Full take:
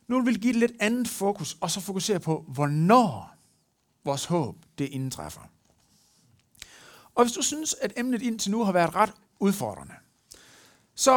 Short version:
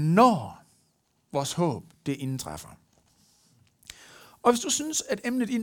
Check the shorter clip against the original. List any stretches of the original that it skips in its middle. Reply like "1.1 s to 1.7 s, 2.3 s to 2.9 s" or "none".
none